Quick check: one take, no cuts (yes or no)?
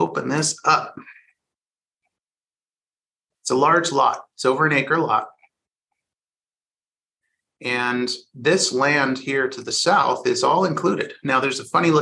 yes